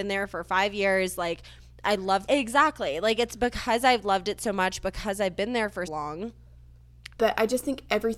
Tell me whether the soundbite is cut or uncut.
cut